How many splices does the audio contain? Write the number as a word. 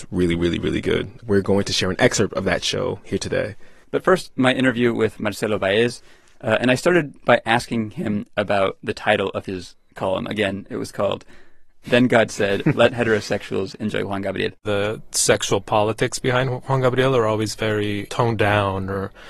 two